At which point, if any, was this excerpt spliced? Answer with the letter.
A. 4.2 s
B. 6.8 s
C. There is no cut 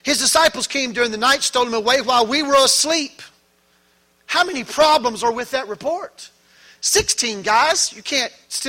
C